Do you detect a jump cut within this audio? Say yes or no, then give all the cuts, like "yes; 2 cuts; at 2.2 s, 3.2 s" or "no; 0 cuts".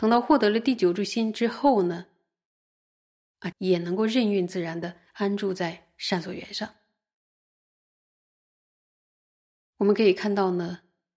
yes; 1 cut; at 3.5 s